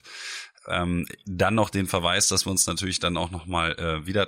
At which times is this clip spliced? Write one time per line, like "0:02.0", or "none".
none